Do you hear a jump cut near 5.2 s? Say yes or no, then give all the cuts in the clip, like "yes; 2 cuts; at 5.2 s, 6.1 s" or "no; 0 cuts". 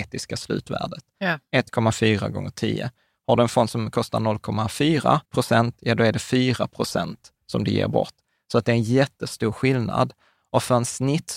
yes; 1 cut; at 5.2 s